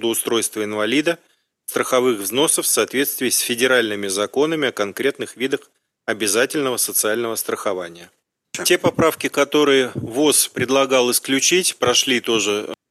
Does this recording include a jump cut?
no; 0 cuts

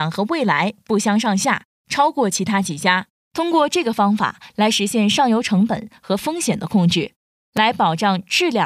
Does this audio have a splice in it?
yes; 2 cuts; at 3.2 s, 7.4 s

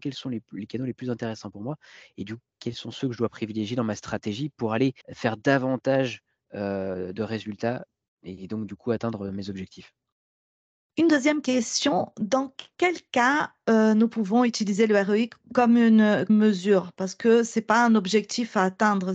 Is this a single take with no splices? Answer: no; 2 cuts; at 5.0 s, 16.3 s

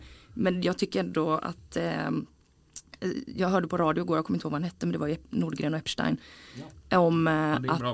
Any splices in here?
no; 0 cuts

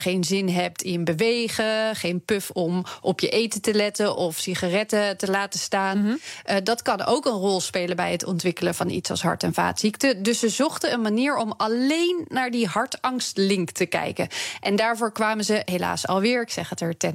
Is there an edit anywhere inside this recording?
no; 0 cuts

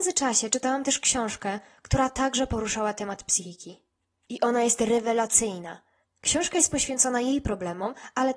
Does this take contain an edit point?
yes; 1 cut; at 6.0 s

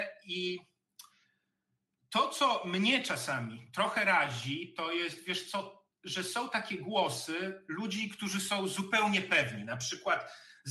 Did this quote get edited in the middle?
no; 0 cuts

